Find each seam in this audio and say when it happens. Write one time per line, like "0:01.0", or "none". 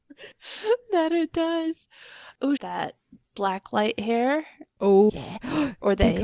0:02.6
0:05.1